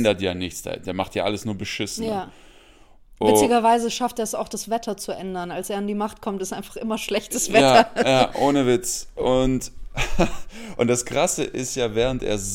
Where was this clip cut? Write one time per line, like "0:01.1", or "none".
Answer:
none